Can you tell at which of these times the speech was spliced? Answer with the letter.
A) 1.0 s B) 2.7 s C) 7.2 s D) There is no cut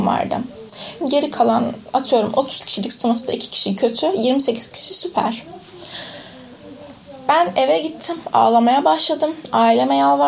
A